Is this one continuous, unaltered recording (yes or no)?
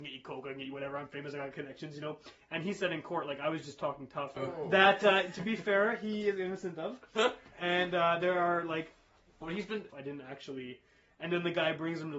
no